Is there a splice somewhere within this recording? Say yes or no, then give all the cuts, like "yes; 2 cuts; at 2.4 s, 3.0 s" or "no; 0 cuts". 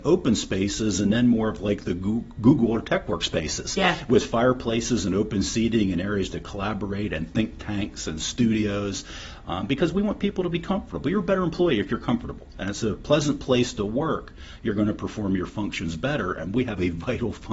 no; 0 cuts